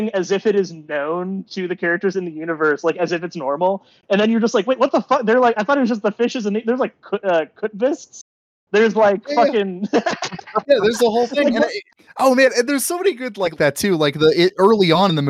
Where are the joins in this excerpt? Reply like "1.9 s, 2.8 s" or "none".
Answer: 13.6 s